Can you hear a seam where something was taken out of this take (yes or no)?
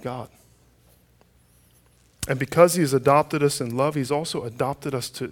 no